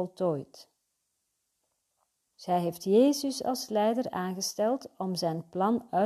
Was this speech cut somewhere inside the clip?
yes; 1 cut; at 2.3 s

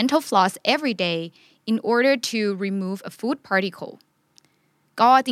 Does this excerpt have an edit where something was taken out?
no; 0 cuts

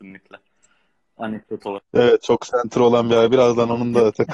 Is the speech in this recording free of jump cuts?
no; 1 cut; at 1.9 s

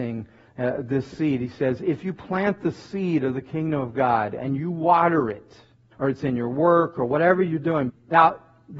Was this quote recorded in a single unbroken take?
no; 2 cuts; at 5.9 s, 7.9 s

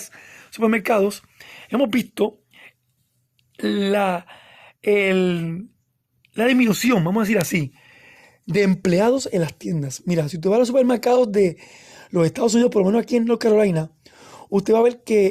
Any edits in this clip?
no; 0 cuts

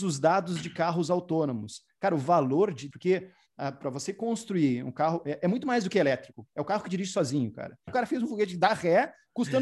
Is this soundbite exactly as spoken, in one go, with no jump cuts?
no; 2 cuts; at 2.9 s, 7.9 s

